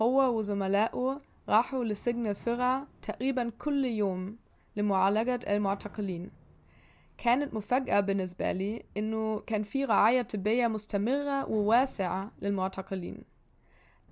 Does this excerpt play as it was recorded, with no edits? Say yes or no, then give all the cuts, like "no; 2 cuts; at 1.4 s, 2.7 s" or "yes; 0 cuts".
yes; 0 cuts